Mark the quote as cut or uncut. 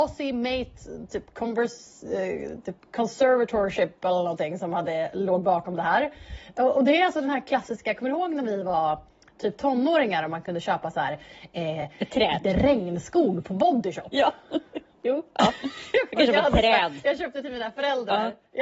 uncut